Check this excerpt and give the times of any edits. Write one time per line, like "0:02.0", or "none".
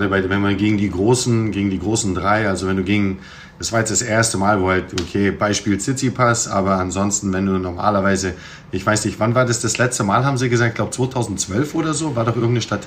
none